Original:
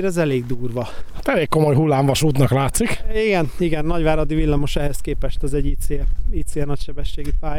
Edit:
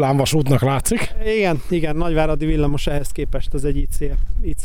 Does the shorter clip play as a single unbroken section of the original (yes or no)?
yes